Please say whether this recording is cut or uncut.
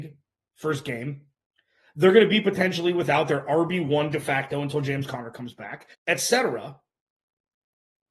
cut